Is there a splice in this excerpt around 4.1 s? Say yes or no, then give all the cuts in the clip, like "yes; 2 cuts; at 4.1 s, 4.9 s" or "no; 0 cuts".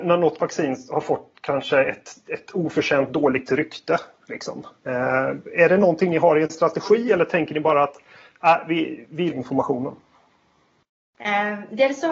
no; 1 cut; at 9.3 s